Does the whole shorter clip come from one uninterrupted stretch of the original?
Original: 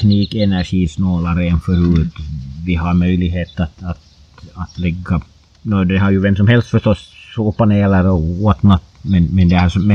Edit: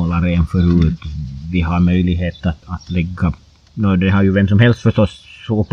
no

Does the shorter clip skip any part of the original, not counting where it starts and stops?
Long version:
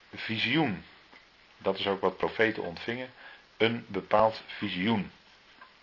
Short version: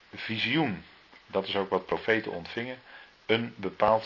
yes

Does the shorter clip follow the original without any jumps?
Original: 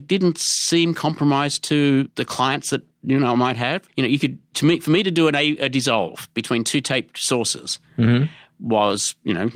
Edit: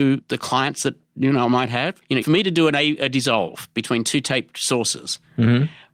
no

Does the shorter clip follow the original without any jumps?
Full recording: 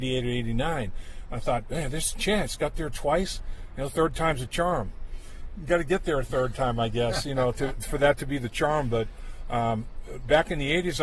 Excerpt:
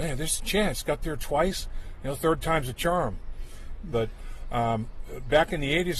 no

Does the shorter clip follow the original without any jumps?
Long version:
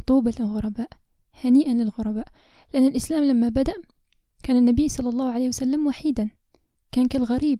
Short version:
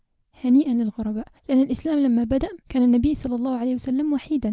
no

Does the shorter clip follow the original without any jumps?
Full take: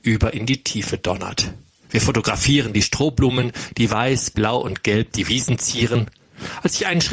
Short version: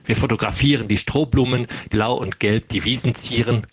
no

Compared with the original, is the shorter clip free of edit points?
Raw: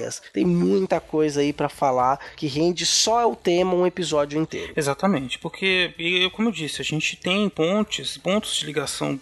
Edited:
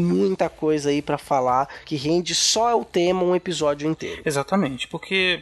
yes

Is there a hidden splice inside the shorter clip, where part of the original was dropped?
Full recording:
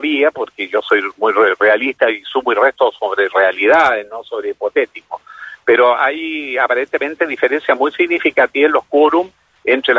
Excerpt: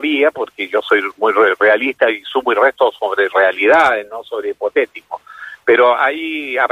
no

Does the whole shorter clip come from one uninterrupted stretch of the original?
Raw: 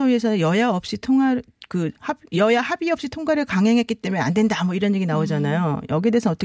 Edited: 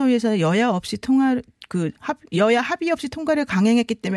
yes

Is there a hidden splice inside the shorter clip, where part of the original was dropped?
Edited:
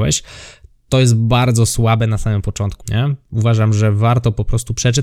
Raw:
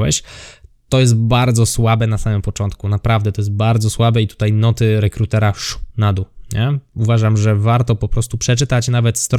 yes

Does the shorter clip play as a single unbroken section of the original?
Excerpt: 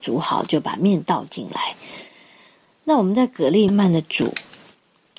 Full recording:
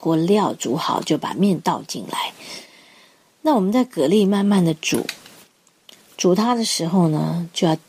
no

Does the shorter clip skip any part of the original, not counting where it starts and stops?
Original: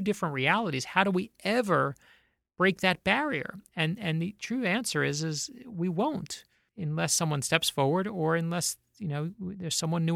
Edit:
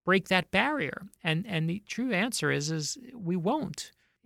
no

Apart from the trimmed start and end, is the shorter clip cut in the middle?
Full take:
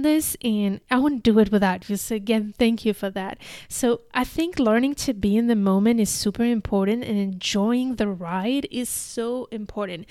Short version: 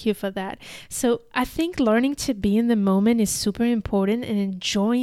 no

